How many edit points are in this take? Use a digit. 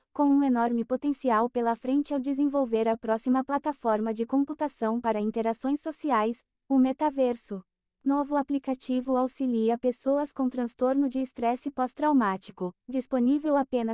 2